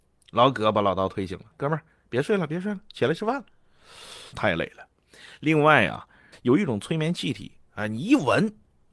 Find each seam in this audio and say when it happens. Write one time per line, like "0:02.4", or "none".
0:01.5
0:04.3
0:06.3